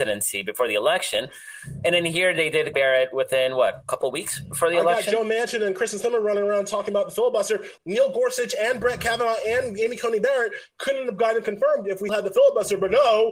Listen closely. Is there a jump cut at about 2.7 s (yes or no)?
yes